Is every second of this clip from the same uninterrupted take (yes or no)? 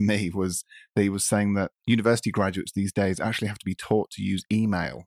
yes